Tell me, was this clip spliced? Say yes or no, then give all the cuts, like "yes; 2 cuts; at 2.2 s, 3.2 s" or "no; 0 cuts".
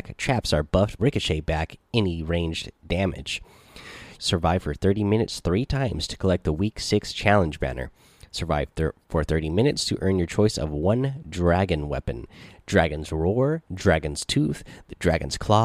yes; 2 cuts; at 1.0 s, 4.1 s